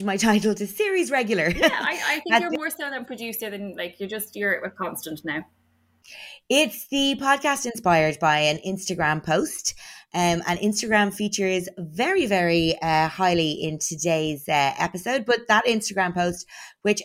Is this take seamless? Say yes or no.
yes